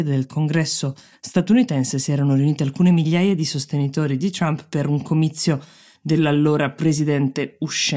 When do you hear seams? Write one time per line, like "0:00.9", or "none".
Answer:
none